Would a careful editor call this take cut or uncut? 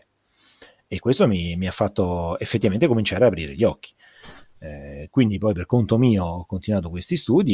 uncut